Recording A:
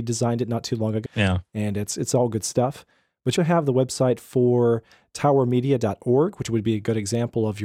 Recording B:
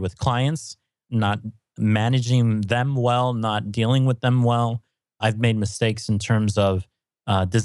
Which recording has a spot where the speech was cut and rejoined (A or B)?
A